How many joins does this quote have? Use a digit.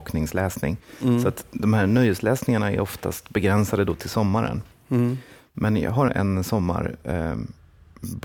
1